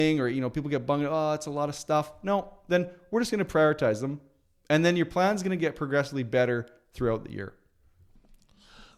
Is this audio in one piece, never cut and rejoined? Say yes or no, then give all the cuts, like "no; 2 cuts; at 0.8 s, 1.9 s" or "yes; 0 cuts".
yes; 0 cuts